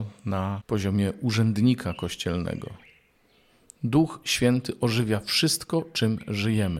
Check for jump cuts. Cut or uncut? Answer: uncut